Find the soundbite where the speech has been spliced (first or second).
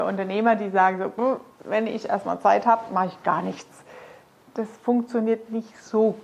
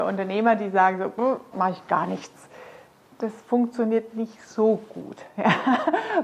second